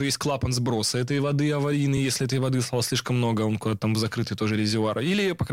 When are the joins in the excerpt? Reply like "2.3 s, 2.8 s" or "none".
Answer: none